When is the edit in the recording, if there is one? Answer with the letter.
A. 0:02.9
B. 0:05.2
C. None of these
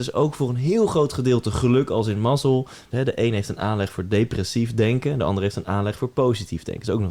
A